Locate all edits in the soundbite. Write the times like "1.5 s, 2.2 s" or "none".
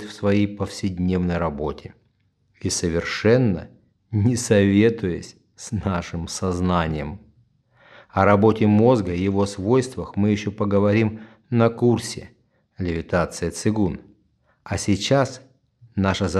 none